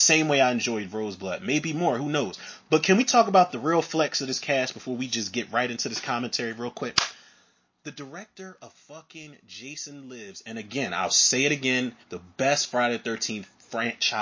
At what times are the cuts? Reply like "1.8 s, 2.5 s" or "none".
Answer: 12.0 s